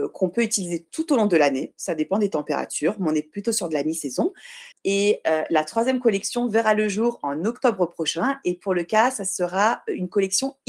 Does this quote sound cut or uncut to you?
cut